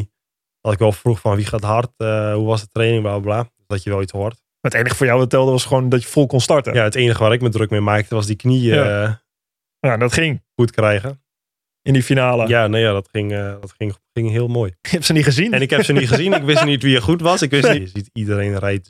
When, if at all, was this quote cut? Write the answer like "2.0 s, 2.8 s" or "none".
14.8 s, 17.7 s